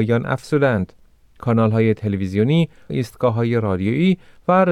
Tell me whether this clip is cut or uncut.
cut